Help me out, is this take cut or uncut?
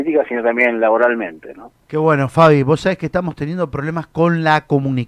cut